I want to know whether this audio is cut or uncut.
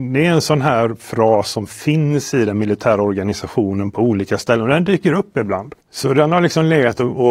cut